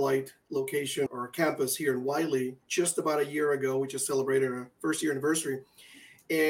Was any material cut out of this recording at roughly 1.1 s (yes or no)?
yes